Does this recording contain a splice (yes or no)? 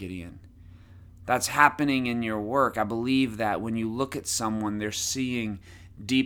no